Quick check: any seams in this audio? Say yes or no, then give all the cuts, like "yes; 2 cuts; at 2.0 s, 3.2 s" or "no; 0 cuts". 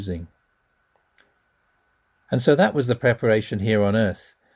no; 0 cuts